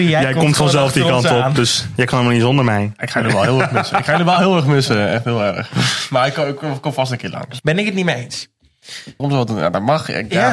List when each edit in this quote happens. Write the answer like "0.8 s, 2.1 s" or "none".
7.6 s, 9.2 s